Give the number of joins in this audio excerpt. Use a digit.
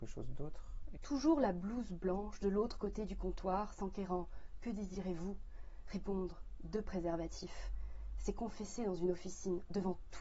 1